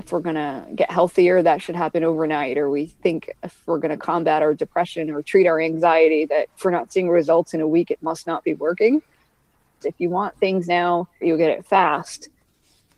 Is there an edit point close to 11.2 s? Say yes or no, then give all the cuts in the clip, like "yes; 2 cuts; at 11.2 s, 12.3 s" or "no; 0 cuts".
yes; 2 cuts; at 9.8 s, 11.2 s